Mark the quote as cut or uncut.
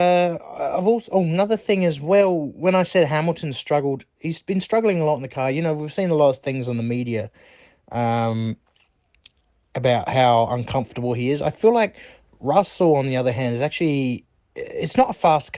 uncut